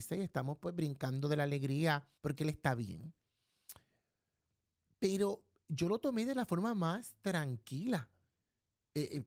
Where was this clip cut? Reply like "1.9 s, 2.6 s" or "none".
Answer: 2.2 s